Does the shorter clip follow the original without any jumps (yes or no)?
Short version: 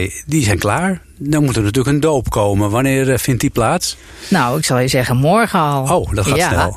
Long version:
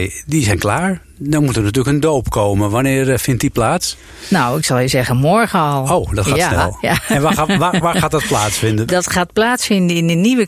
yes